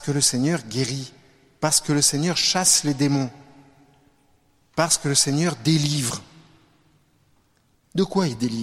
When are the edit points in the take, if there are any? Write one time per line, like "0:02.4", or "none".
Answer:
none